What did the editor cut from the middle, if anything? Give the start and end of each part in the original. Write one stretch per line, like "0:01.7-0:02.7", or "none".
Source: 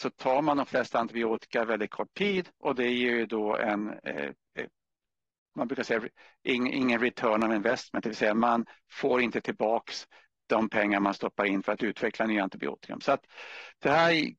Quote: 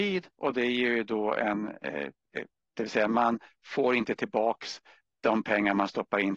0:05.0-0:08.0